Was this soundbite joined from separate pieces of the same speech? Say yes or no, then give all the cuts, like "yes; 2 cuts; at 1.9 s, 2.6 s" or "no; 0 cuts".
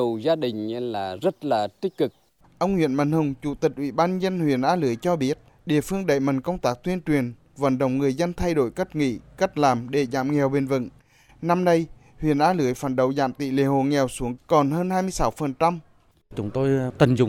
no; 0 cuts